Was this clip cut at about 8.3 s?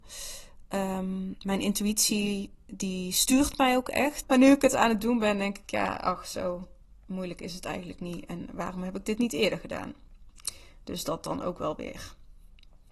no; 1 cut; at 4.2 s

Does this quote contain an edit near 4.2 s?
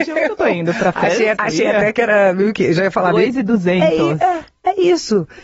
no; 1 cut; at 1.4 s

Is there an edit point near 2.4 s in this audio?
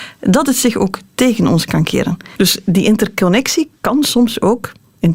yes; 1 cut; at 2.4 s

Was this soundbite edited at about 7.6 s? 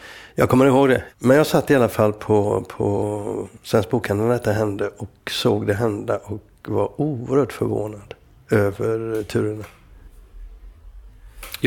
no; 2 cuts; at 1.1 s, 3.6 s

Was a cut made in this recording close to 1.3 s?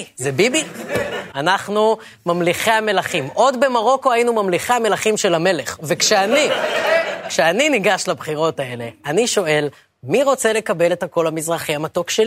yes; 1 cut; at 1.3 s

